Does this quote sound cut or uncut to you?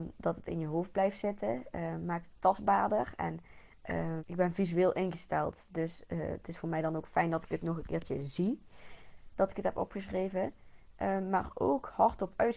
cut